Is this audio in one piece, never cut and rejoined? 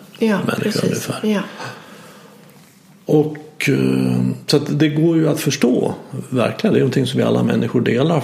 no; 1 cut; at 6.7 s

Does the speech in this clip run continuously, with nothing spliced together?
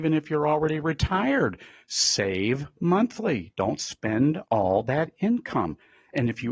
yes; 0 cuts

